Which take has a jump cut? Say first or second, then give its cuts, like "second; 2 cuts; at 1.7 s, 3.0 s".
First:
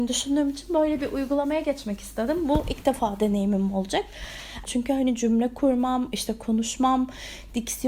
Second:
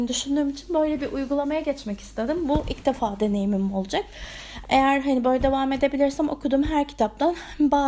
first; 1 cut; at 4.7 s